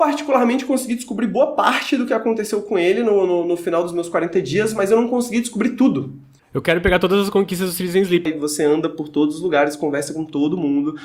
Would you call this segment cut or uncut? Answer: cut